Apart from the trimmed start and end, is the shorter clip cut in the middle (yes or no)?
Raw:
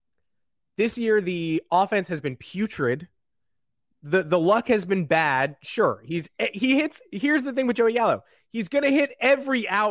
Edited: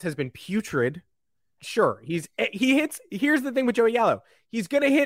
yes